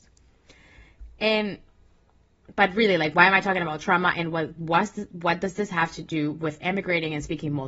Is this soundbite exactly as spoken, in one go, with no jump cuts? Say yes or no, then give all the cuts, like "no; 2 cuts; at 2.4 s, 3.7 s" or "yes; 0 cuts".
yes; 0 cuts